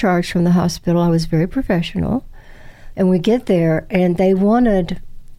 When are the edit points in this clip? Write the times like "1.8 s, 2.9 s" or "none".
2.9 s